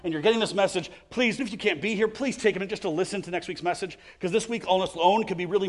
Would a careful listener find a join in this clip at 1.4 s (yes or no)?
yes